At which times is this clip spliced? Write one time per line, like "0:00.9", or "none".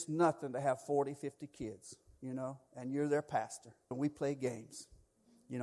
0:03.9